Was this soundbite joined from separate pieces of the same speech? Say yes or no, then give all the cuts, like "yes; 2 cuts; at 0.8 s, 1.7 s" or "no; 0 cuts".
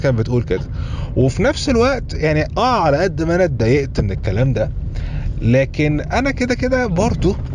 no; 0 cuts